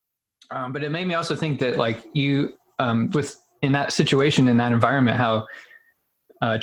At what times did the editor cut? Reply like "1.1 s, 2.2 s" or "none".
3.1 s